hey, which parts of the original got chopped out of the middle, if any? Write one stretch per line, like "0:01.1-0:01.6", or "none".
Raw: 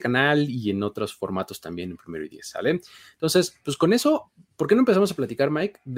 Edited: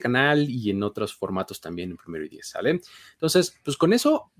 none